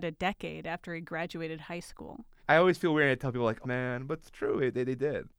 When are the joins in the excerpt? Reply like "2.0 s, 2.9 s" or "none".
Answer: 2.4 s, 3.6 s